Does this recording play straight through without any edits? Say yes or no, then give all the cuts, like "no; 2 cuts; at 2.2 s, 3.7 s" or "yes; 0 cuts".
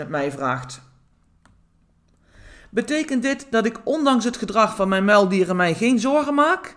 yes; 0 cuts